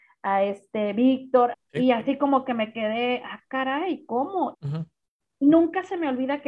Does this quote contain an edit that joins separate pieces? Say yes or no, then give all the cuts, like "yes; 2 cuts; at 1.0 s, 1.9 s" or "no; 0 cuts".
yes; 2 cuts; at 1.5 s, 4.5 s